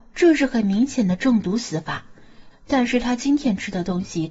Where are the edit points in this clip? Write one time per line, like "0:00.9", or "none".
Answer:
0:02.5